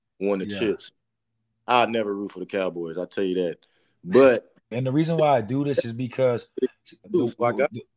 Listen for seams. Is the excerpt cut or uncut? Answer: cut